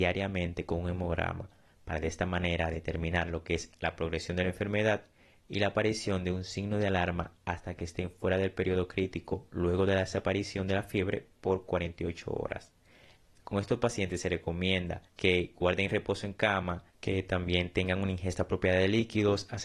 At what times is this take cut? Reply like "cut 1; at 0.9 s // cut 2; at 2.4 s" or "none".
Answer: cut 1; at 15.1 s // cut 2; at 16.9 s